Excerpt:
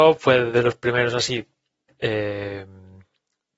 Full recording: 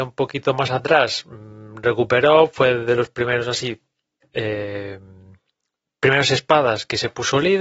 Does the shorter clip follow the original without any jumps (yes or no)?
yes